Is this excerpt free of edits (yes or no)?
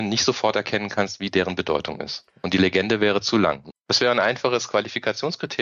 no